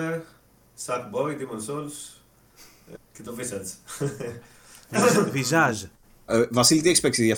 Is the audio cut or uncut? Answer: cut